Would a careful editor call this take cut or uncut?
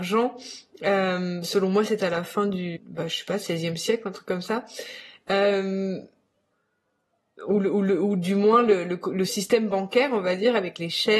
cut